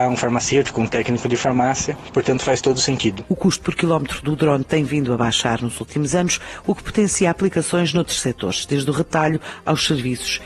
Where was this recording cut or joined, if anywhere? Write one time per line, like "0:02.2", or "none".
none